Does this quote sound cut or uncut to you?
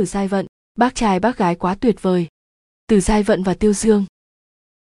uncut